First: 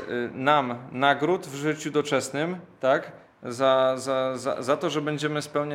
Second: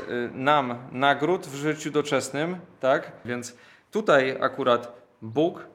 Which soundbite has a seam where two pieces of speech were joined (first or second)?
second